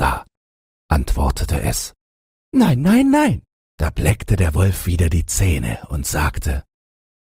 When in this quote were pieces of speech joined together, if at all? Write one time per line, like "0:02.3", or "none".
0:03.6